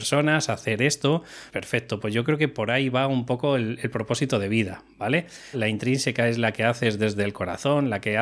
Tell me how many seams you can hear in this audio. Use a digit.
2